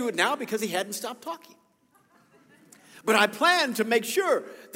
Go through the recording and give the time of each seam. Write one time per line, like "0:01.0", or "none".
none